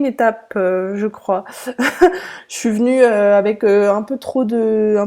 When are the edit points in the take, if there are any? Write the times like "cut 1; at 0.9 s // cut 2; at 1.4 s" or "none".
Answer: none